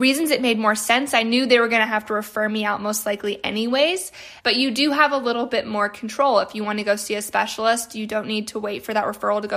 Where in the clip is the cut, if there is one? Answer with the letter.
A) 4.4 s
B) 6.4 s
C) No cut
A